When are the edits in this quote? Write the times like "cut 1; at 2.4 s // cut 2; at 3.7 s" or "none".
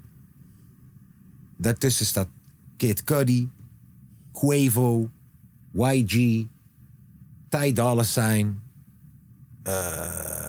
none